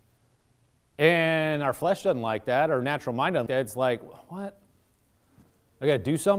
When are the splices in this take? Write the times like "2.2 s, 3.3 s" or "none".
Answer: 3.5 s